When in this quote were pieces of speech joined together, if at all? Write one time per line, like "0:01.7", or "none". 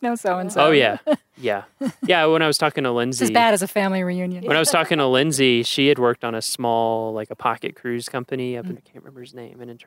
0:08.7